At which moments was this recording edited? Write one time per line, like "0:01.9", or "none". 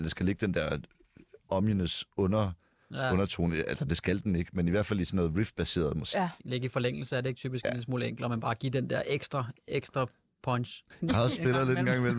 0:11.0